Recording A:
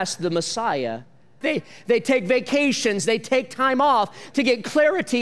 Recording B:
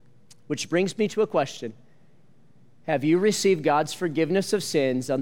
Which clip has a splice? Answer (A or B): A